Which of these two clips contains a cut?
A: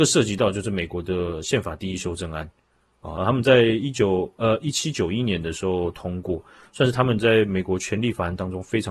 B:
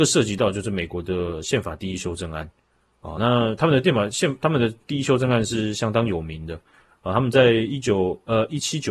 A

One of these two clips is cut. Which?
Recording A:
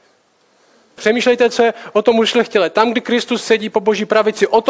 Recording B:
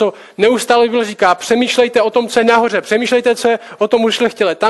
A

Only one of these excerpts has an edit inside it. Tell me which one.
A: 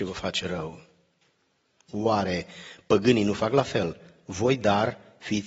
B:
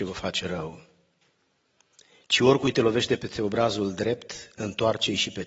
A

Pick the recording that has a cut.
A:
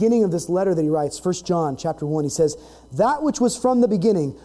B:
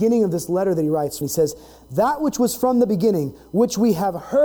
B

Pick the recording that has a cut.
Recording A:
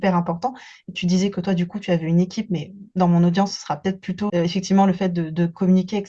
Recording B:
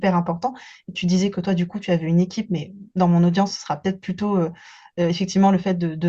A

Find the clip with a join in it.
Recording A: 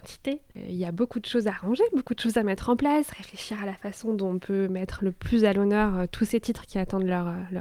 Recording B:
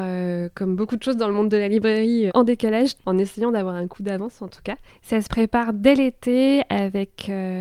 B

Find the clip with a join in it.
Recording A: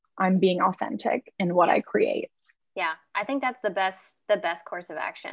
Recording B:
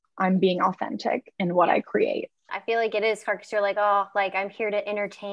B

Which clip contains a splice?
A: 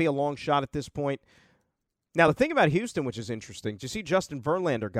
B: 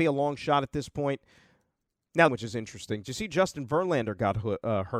B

